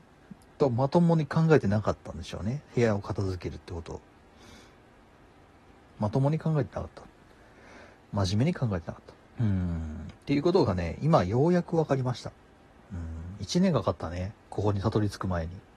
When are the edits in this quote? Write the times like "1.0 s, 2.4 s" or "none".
9.2 s